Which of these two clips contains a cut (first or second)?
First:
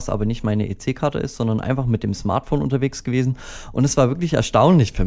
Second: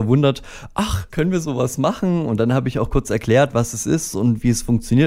second